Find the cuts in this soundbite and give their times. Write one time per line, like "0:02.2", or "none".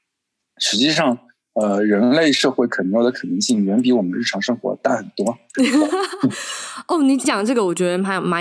0:05.5